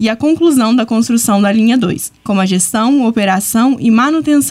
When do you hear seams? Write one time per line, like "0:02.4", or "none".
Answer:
0:02.3